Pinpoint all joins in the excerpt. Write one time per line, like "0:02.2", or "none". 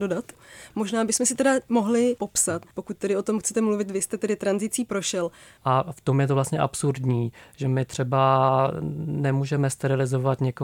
0:02.7
0:05.6

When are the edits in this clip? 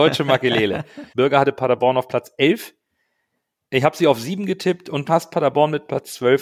0:01.1
0:05.1

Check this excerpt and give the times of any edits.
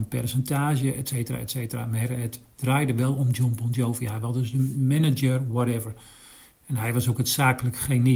none

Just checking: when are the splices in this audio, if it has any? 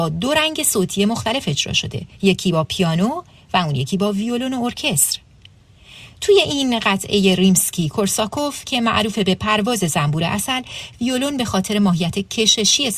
0:02.1

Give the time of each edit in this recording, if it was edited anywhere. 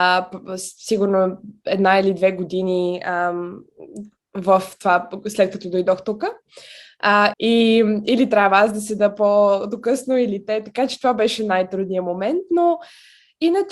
0:07.3

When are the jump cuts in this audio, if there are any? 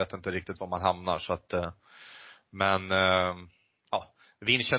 none

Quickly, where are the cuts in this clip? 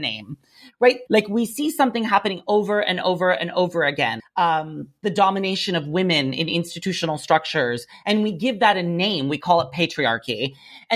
0:01.1
0:04.2

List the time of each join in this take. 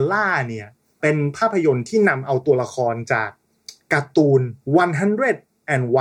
0:01.0
0:04.6

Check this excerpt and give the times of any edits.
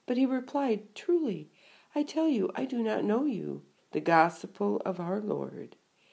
0:03.8

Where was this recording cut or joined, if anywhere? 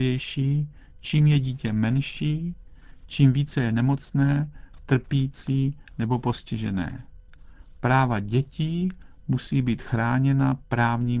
0:03.0

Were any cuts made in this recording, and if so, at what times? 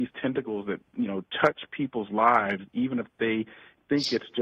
none

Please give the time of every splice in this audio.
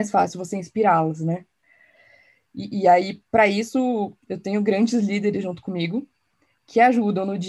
none

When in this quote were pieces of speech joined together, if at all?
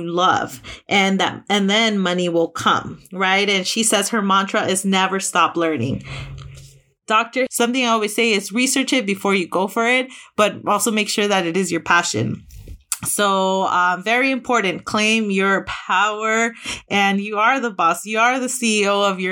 0:07.5

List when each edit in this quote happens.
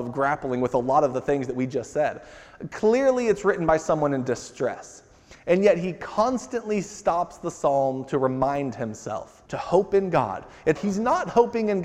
0:09.5
0:10.8

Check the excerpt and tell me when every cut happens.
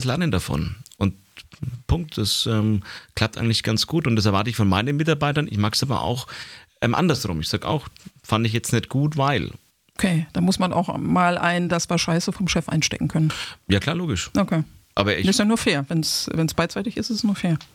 none

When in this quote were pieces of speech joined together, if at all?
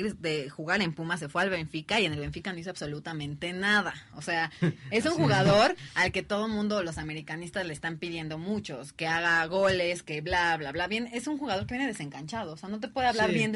none

